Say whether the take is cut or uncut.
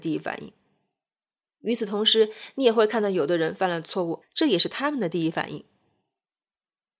cut